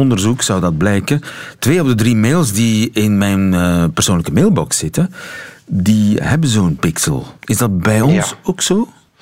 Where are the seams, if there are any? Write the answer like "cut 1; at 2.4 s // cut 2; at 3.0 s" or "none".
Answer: cut 1; at 7.4 s

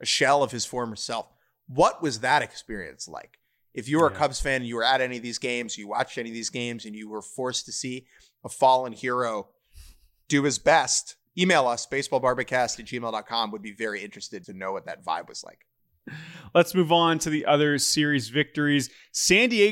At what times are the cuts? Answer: cut 1; at 14.4 s

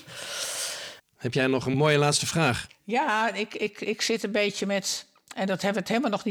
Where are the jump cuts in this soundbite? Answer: cut 1; at 1.0 s

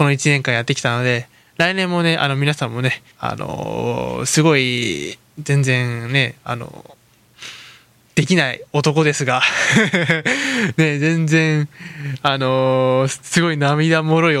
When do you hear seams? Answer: cut 1; at 3.1 s

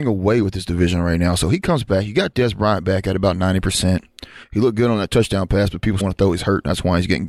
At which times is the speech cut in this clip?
cut 1; at 6.0 s

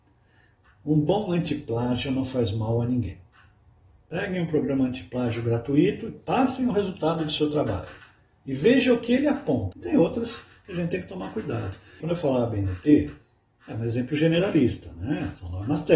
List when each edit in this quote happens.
cut 1; at 9.7 s // cut 2; at 12.0 s

